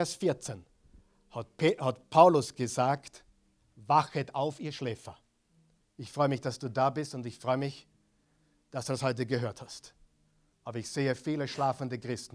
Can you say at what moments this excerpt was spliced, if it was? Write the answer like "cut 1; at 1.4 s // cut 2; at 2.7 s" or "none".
cut 1; at 5.8 s // cut 2; at 10.5 s